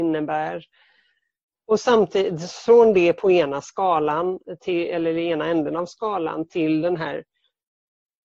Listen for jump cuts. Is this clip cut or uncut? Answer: uncut